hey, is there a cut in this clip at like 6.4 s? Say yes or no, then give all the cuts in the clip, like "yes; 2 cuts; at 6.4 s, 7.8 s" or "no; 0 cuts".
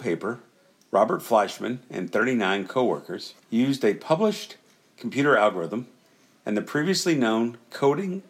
no; 1 cut; at 3.4 s